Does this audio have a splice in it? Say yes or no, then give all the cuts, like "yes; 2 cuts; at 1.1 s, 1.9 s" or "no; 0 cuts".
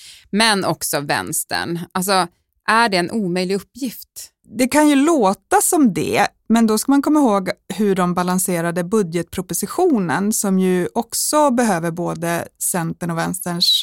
no; 0 cuts